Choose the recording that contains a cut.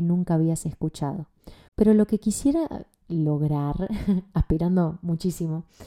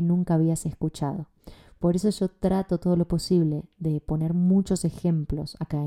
first; 1 cut; at 1.7 s

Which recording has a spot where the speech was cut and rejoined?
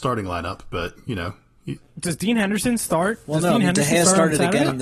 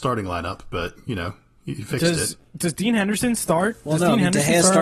first; 1 cut; at 1.8 s

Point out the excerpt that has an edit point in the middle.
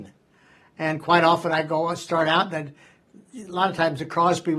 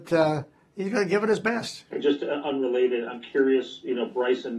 second; 1 cut; at 1.9 s

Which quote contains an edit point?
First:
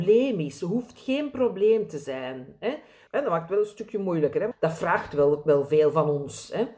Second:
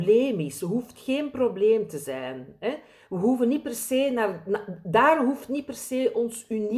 first; 2 cuts; at 3.1 s, 4.5 s

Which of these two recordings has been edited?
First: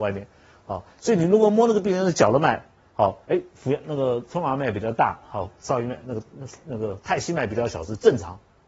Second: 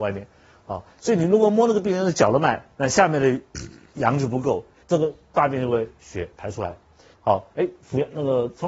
second; 3 cuts; at 2.7 s, 4.8 s, 7.1 s

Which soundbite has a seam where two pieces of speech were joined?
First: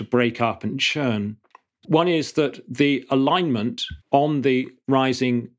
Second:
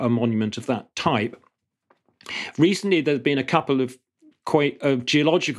first; 2 cuts; at 1.8 s, 4.0 s

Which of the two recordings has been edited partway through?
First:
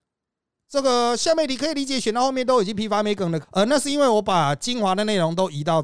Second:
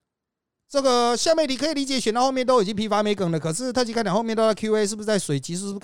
first; 1 cut; at 3.4 s

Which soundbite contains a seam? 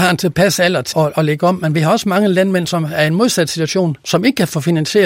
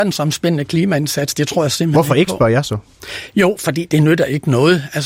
first; 1 cut; at 0.9 s

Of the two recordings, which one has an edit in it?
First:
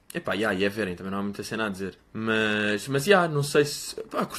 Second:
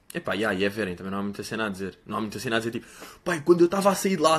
first; 1 cut; at 2.0 s

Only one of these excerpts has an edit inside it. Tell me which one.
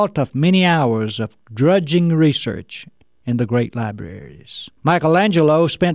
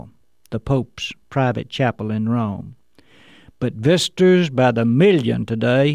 first; 1 cut; at 4.8 s

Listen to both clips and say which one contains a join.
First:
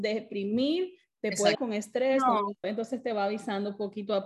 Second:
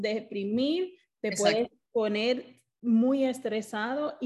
first; 2 cuts; at 1.5 s, 2.6 s

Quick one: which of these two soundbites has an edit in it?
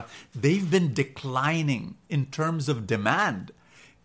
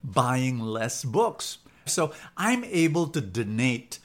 second; 1 cut; at 1.9 s

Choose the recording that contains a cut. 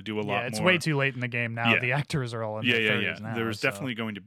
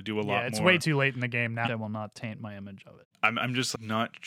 second; 1 cut; at 1.6 s

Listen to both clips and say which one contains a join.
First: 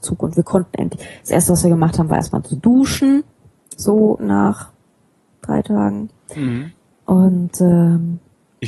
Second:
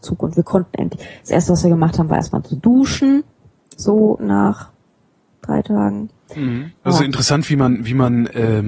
second; 1 cut; at 6.9 s

